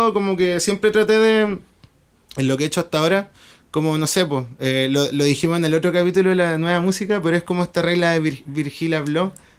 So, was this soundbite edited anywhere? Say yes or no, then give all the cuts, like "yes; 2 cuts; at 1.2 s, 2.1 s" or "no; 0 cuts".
no; 0 cuts